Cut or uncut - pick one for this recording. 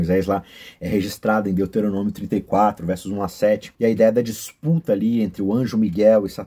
cut